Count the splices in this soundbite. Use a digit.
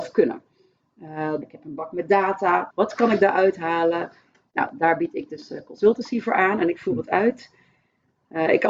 2